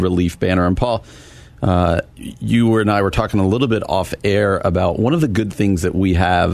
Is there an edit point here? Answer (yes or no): no